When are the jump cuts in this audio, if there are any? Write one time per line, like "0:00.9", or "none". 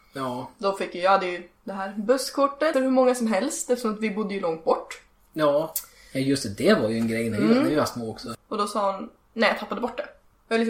0:02.7
0:08.3